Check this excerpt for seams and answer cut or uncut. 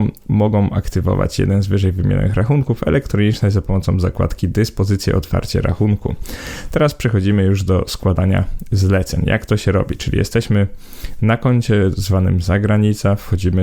uncut